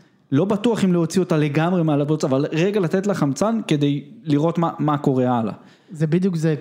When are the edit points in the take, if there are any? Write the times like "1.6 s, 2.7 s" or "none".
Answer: none